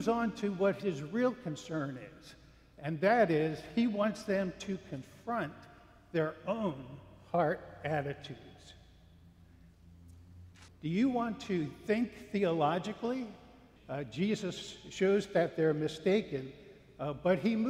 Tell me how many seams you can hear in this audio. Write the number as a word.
two